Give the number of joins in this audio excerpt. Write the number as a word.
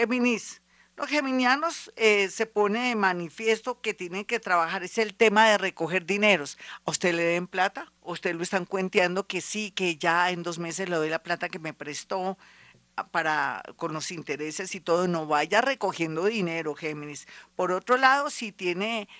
one